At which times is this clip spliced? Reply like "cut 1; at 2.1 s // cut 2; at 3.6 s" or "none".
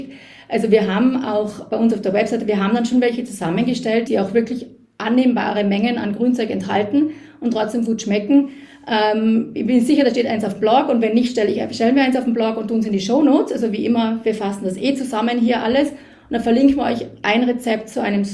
cut 1; at 4.1 s

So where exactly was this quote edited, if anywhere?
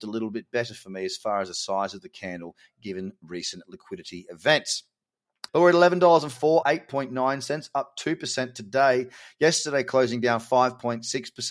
cut 1; at 5.5 s // cut 2; at 6.6 s

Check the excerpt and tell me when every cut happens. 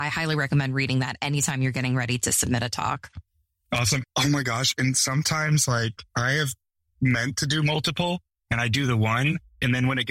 cut 1; at 4.0 s // cut 2; at 6.1 s

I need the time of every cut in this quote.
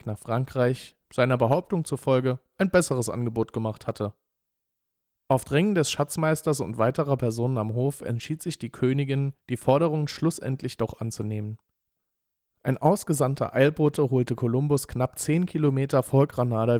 cut 1; at 1.0 s // cut 2; at 9.4 s

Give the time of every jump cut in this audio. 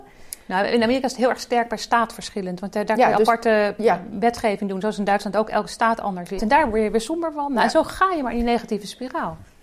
cut 1; at 6.4 s

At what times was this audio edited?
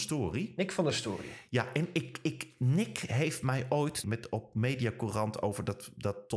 cut 1; at 4.0 s

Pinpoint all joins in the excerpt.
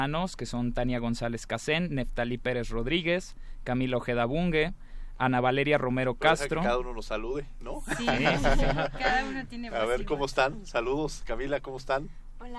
none

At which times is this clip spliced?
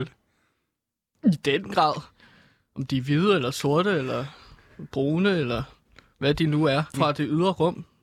cut 1; at 6.9 s

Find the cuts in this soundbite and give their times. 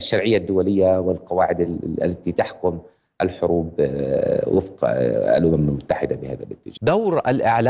cut 1; at 6.8 s

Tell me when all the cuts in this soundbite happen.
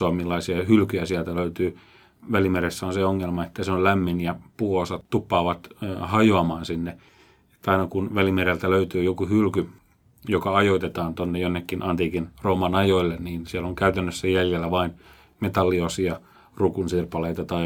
none

